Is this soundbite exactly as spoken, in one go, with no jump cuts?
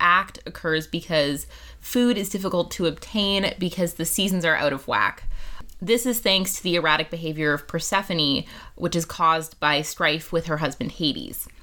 yes; 0 cuts

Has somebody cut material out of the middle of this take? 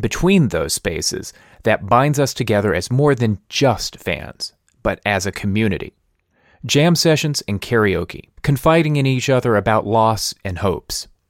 yes; 1 cut; at 8.4 s

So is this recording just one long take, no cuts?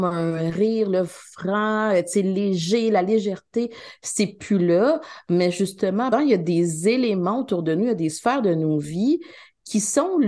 no; 1 cut; at 6.1 s

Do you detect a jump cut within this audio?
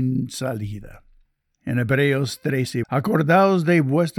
yes; 1 cut; at 2.8 s

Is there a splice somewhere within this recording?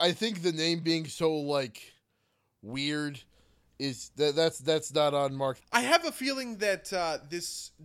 yes; 1 cut; at 5.6 s

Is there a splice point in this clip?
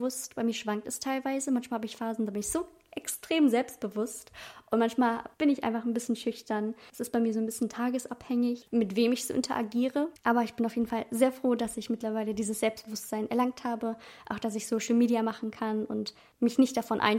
yes; 1 cut; at 8.7 s

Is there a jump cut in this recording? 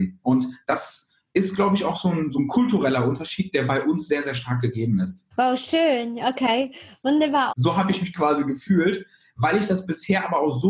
yes; 2 cuts; at 5.3 s, 7.5 s

